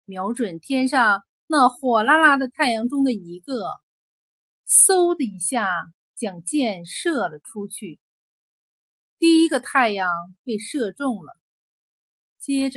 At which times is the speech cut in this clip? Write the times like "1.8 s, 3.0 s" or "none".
none